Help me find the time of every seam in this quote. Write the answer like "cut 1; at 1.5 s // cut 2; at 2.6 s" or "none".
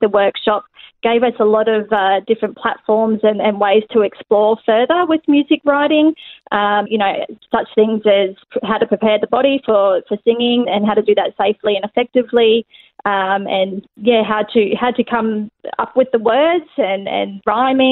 cut 1; at 6.9 s // cut 2; at 10.6 s // cut 3; at 13.8 s